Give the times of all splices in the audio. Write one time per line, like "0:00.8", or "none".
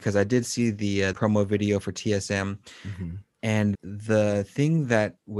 0:01.1
0:03.7